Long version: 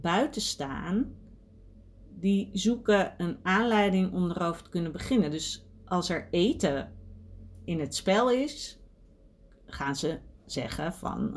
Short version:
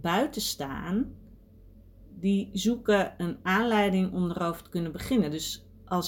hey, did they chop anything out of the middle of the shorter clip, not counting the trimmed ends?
no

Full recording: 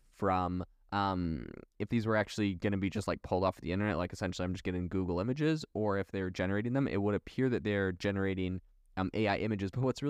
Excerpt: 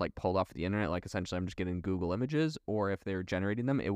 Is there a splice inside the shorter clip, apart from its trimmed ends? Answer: no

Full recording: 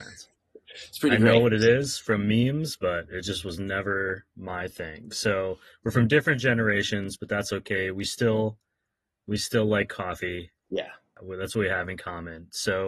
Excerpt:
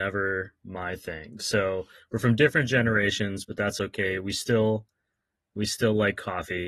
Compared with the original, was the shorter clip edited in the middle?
no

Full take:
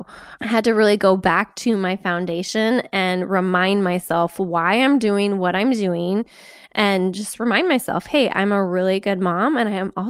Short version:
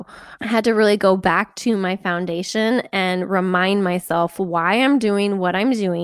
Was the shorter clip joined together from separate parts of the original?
no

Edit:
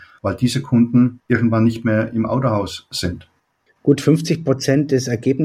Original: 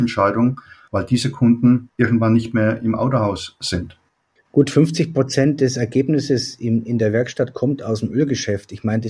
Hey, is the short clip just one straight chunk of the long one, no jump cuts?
yes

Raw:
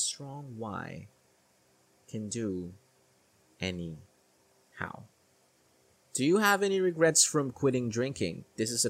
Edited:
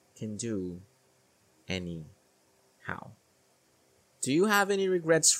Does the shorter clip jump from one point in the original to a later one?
no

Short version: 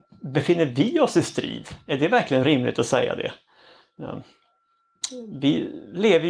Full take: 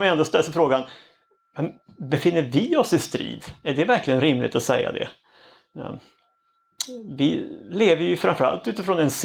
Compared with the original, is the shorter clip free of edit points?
yes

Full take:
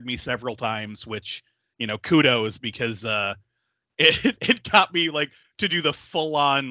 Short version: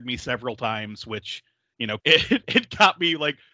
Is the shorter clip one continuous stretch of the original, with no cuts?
no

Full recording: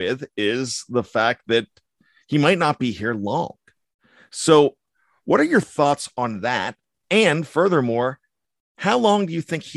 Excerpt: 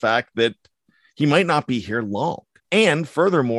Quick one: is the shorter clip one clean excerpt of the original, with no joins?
no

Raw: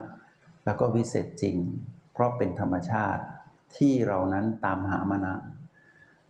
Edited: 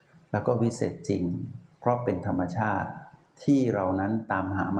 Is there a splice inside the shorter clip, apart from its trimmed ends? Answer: no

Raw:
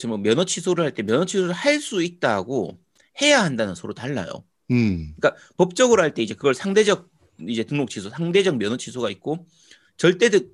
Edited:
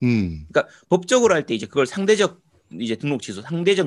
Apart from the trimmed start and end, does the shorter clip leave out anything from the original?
no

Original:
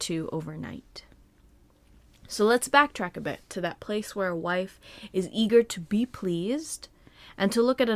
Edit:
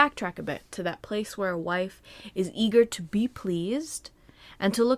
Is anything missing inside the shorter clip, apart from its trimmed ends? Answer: no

